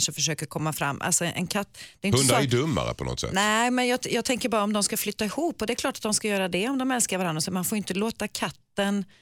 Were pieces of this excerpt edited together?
no; 0 cuts

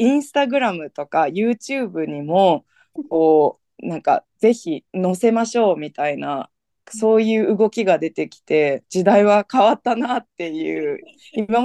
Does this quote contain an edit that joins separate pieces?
yes; 2 cuts; at 3.0 s, 4.9 s

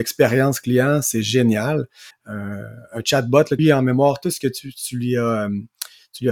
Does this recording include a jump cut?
yes; 2 cuts; at 2.1 s, 3.6 s

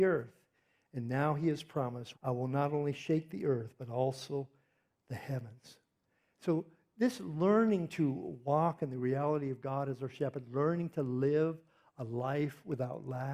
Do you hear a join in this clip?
yes; 1 cut; at 2.1 s

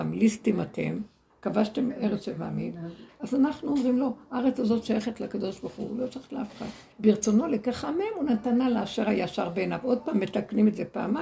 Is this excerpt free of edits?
no; 1 cut; at 6.9 s

